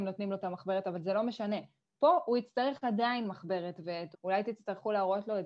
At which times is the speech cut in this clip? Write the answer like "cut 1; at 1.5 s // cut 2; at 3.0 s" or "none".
cut 1; at 4.1 s